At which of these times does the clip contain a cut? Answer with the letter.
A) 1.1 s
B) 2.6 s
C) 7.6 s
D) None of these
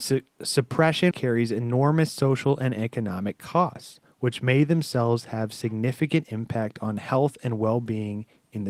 A